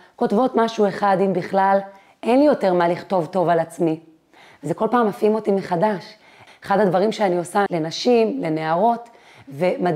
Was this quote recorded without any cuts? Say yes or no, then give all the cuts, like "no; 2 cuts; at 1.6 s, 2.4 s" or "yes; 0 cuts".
no; 2 cuts; at 6.5 s, 7.7 s